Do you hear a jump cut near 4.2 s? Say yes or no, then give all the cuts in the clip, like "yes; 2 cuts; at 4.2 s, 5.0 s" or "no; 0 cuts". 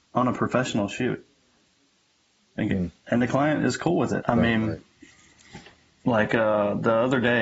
yes; 1 cut; at 4.2 s